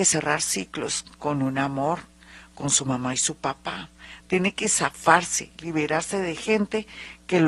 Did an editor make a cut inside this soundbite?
yes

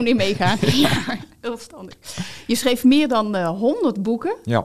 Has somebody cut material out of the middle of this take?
no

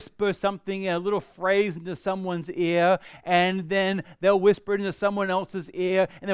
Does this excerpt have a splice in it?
no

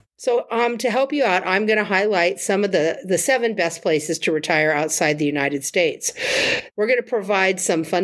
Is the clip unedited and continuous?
no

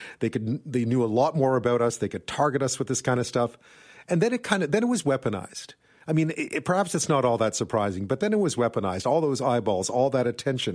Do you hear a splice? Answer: no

